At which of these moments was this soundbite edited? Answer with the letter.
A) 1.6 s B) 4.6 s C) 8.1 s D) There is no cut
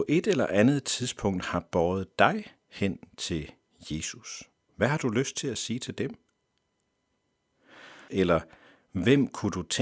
C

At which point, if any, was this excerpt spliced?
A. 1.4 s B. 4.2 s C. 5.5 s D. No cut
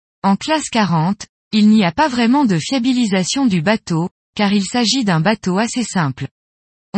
B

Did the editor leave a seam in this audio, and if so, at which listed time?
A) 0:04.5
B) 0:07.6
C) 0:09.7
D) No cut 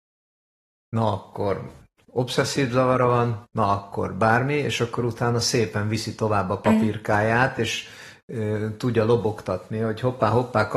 D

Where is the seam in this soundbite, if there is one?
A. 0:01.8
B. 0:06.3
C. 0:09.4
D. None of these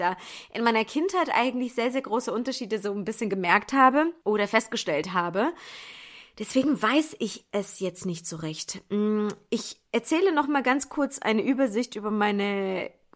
D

